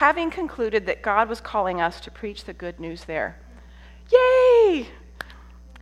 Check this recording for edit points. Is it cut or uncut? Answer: uncut